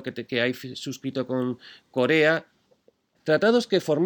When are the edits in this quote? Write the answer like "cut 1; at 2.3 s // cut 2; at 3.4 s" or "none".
cut 1; at 3.2 s